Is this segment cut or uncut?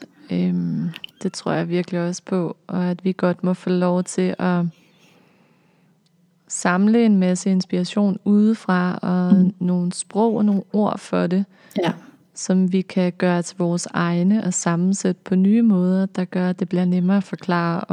cut